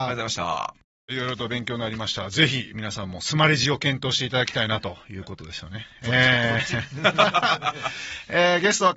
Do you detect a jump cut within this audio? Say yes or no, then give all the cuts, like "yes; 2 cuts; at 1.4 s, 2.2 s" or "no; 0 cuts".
yes; 1 cut; at 1.1 s